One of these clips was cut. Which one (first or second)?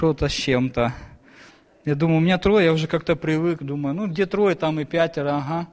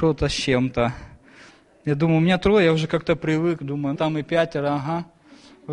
second